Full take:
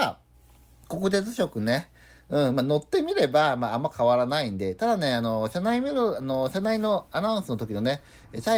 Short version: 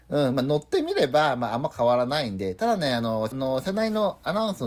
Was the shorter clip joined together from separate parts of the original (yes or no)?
yes